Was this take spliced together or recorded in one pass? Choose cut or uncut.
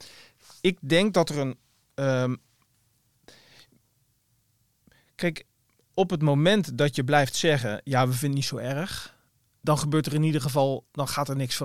uncut